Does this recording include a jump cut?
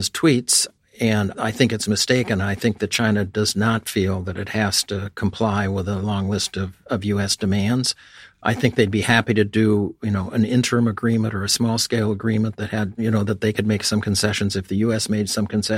no; 0 cuts

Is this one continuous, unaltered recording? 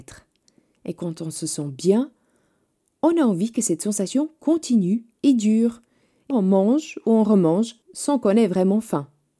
no; 2 cuts; at 6.3 s, 7.8 s

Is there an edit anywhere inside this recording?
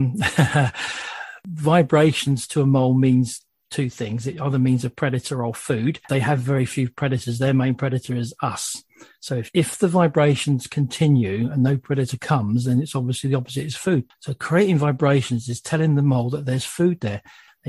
yes; 1 cut; at 6.0 s

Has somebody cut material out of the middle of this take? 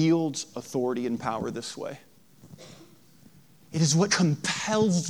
yes; 1 cut; at 4.1 s

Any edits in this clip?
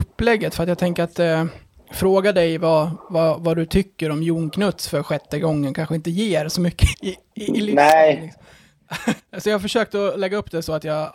yes; 2 cuts; at 6.9 s, 9.2 s

